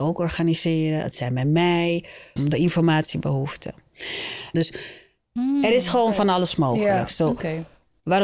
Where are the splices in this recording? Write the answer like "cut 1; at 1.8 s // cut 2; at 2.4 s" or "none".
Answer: cut 1; at 2.4 s // cut 2; at 4.5 s